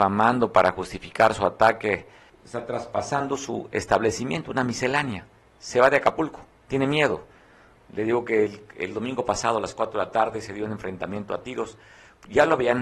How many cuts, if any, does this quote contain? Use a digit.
1